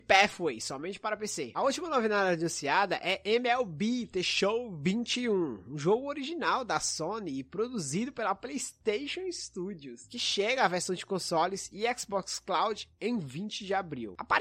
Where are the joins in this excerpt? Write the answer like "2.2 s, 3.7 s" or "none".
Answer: none